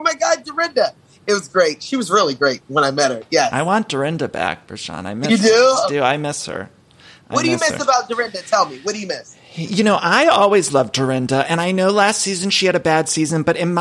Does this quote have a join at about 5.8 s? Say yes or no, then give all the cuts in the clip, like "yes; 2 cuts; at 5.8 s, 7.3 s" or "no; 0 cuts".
yes; 1 cut; at 5.8 s